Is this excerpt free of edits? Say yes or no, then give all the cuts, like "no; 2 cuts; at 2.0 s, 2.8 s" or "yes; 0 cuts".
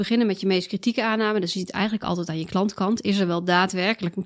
yes; 0 cuts